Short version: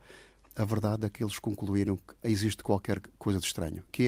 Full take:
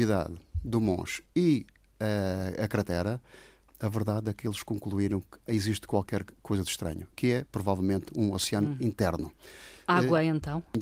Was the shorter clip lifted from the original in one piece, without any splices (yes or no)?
yes